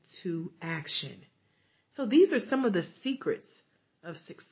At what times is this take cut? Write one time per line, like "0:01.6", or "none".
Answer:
none